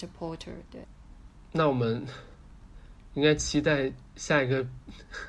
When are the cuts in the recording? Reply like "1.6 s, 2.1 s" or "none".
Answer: none